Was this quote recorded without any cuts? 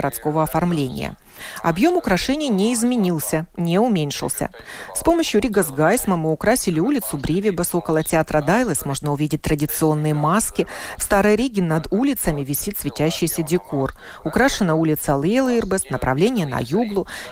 yes; 0 cuts

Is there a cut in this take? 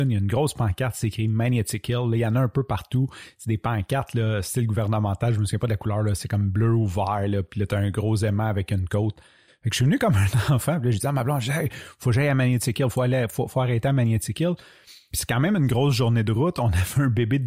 no; 0 cuts

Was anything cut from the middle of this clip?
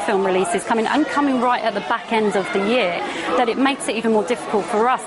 no; 0 cuts

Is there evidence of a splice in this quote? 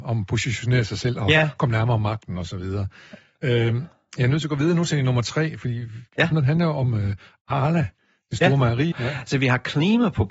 yes; 2 cuts; at 6.3 s, 8.9 s

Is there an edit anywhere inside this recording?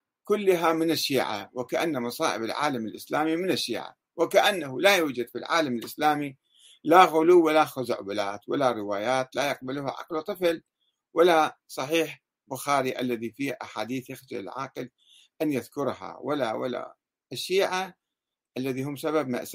no; 0 cuts

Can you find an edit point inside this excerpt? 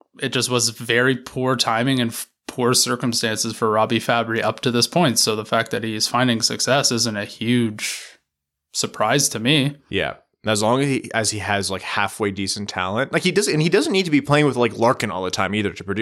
no; 0 cuts

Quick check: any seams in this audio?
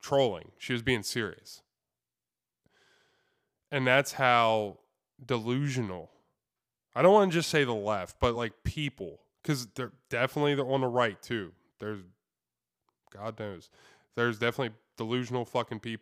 no; 0 cuts

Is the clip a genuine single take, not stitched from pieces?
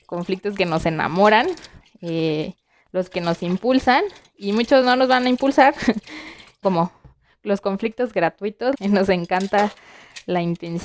no; 2 cuts; at 6.6 s, 8.7 s

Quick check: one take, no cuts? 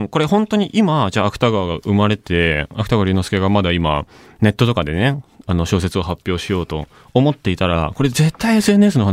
no; 1 cut; at 2.2 s

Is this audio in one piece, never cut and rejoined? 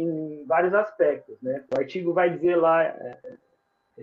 no; 1 cut; at 1.7 s

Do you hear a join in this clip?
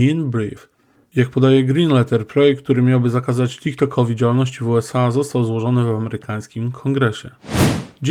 no; 0 cuts

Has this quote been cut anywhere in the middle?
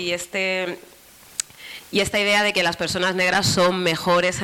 no; 0 cuts

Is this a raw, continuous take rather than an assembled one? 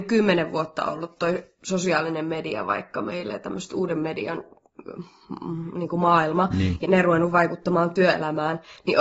no; 1 cut; at 6.8 s

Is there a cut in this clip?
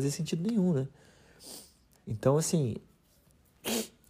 yes; 1 cut; at 1.9 s

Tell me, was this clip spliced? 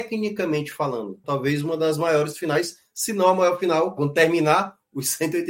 yes; 2 cuts; at 1.2 s, 4.0 s

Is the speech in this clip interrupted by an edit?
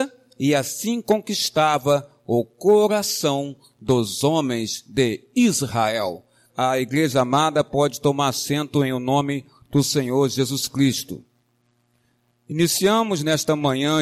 yes; 1 cut; at 6.5 s

